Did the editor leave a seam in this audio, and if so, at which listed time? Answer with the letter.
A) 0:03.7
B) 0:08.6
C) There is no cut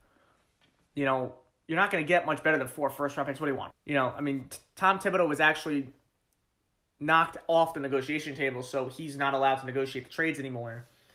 A